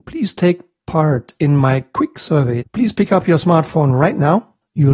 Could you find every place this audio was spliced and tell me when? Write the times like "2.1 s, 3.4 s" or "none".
2.6 s